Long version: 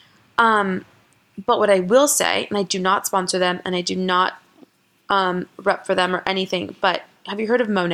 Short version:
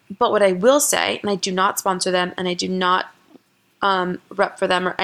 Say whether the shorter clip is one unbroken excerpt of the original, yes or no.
yes